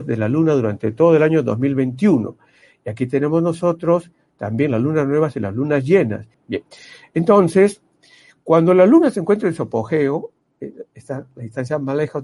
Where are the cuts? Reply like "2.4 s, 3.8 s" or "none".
6.3 s